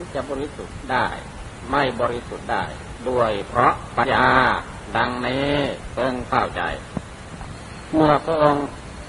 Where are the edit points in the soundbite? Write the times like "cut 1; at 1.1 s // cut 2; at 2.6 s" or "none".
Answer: cut 1; at 4.0 s